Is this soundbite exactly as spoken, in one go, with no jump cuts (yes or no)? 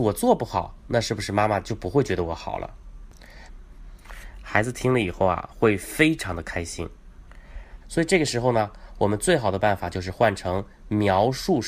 no